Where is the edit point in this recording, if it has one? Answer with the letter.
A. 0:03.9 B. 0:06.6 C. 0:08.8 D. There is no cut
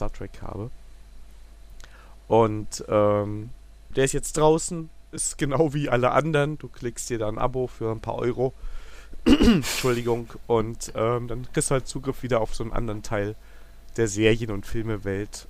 A